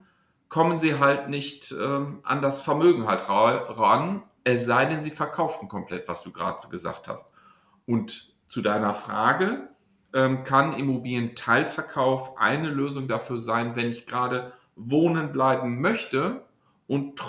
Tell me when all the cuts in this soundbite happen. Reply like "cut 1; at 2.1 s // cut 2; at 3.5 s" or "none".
none

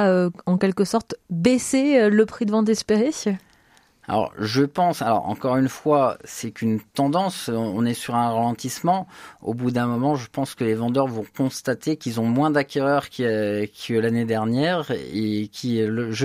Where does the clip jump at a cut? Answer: none

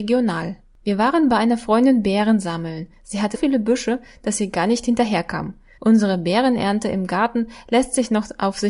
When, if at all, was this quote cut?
cut 1; at 3.3 s // cut 2; at 5.8 s

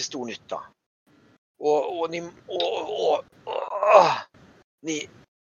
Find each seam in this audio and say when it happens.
none

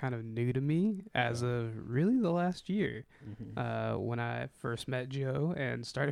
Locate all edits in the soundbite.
none

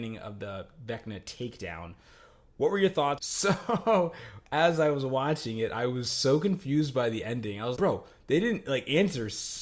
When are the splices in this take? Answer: cut 1; at 3.2 s // cut 2; at 7.7 s

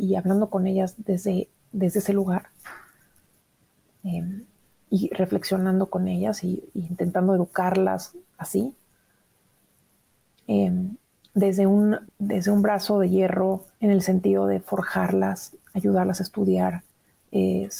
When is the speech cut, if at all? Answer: cut 1; at 12.1 s // cut 2; at 13.7 s

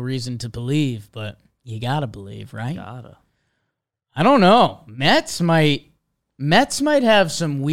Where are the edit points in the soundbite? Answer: none

